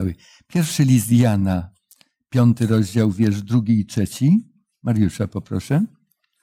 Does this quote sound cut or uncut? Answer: uncut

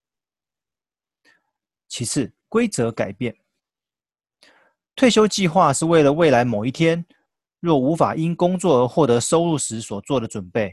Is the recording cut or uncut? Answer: uncut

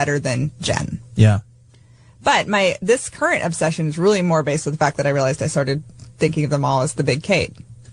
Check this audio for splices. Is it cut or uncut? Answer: uncut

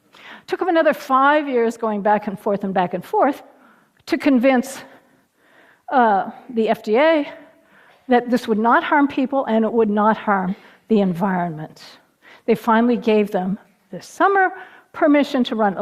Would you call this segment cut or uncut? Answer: uncut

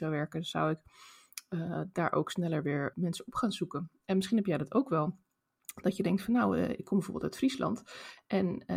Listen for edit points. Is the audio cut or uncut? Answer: cut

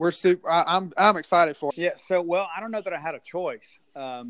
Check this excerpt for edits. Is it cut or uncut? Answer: cut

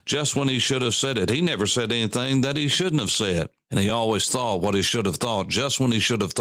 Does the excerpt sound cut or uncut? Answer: uncut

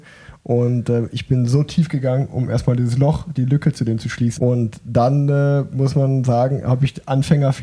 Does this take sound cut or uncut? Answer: cut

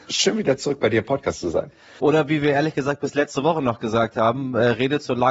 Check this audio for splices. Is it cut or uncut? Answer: cut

